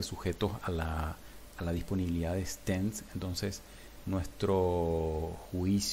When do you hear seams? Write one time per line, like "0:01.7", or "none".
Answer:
none